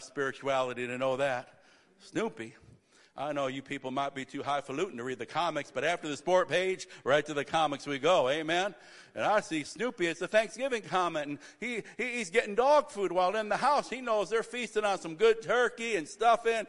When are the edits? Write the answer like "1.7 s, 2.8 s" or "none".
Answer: none

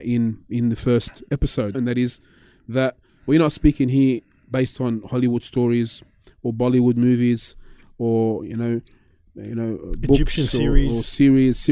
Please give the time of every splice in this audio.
1.7 s

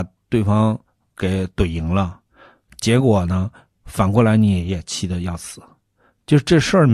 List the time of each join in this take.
none

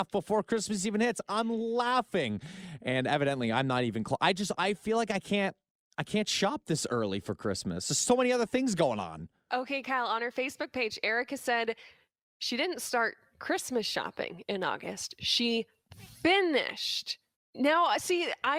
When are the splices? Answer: 17.3 s

